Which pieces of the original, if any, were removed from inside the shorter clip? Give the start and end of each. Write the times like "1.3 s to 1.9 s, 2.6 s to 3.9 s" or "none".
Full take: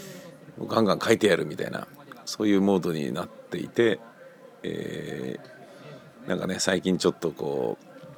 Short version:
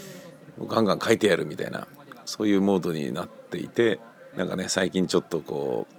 4.3 s to 6.2 s